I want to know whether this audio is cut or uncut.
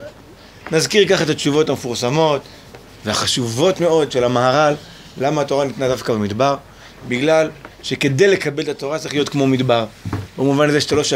cut